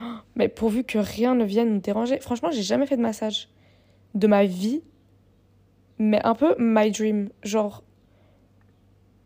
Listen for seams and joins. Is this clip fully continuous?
yes; 0 cuts

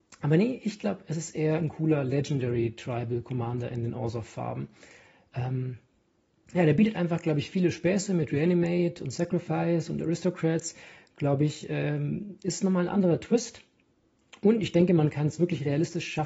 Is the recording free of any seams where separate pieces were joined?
yes; 0 cuts

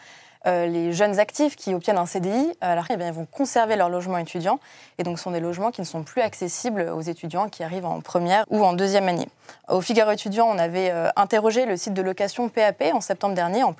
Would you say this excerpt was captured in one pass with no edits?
no; 2 cuts; at 2.9 s, 8.4 s

